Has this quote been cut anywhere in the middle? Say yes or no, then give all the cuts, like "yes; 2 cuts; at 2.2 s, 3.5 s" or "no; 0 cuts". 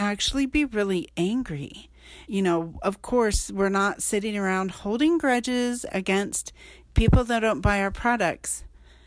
yes; 1 cut; at 2.3 s